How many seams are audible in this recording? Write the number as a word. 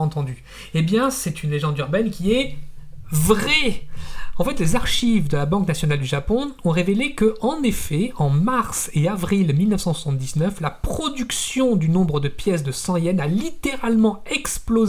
zero